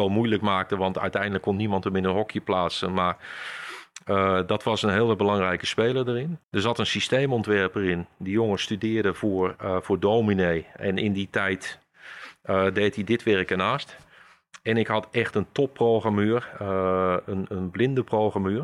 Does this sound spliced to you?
yes; 1 cut; at 6.4 s

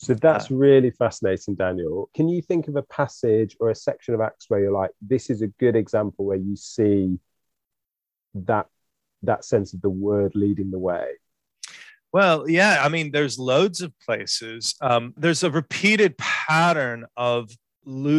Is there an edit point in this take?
yes; 2 cuts; at 2.1 s, 15.2 s

